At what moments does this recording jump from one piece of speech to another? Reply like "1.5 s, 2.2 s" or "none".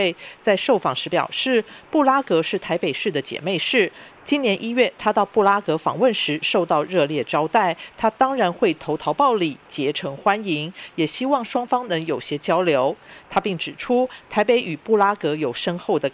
none